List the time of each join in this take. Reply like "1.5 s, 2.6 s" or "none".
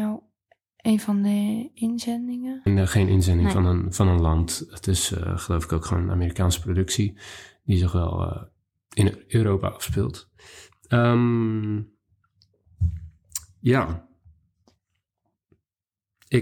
2.7 s